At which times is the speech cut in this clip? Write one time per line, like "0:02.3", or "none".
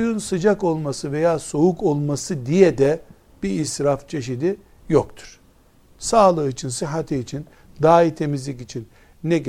none